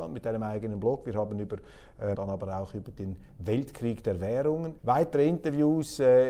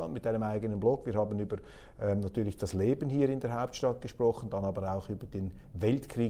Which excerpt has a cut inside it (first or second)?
first